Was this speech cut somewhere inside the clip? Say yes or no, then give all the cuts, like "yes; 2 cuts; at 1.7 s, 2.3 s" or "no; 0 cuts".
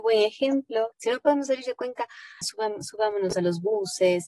yes; 2 cuts; at 0.9 s, 2.4 s